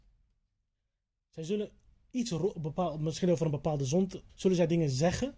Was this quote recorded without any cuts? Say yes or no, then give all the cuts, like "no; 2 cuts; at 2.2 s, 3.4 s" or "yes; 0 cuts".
no; 2 cuts; at 2.5 s, 4.3 s